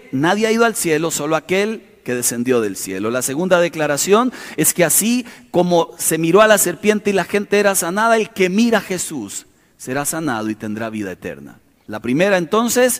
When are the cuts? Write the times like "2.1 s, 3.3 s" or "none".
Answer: 11.9 s